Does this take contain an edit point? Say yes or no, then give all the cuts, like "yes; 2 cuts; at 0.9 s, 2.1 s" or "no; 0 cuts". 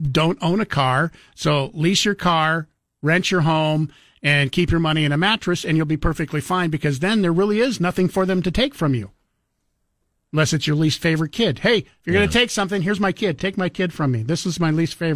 no; 0 cuts